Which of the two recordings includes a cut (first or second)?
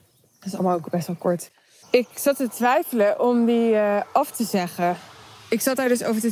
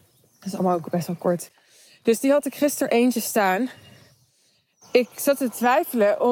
first